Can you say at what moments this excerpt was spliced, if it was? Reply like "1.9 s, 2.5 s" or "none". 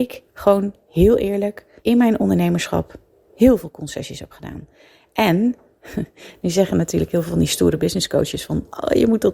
1.8 s